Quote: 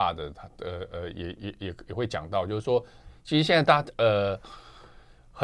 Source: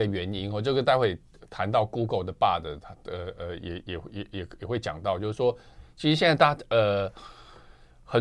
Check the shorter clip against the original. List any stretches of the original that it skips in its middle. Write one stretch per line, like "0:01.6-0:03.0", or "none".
0:03.8-0:04.1

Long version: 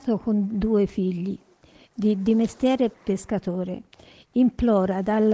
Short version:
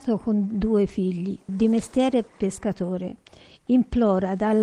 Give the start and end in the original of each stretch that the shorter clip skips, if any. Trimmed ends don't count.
0:01.5-0:02.2

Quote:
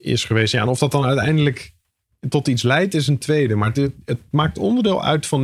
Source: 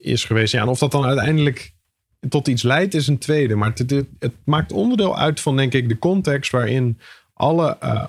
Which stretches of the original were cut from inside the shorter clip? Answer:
0:03.7-0:03.9

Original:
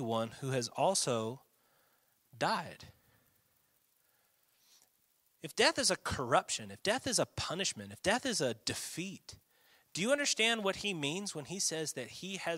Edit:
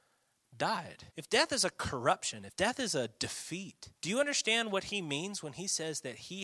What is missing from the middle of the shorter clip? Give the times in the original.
0:02.9-0:05.4
0:06.7-0:07.9
0:09.4-0:09.8

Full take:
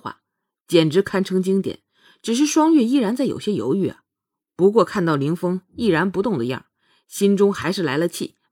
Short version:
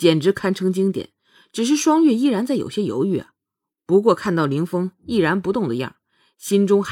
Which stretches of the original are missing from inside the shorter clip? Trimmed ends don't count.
none

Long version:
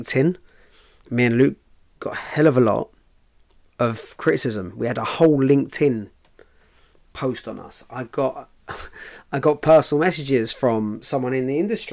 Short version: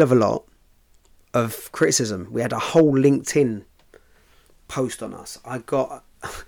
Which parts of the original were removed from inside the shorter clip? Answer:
none

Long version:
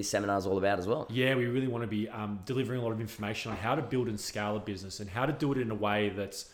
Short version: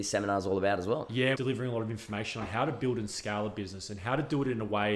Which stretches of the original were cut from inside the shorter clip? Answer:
0:01.3-0:02.4

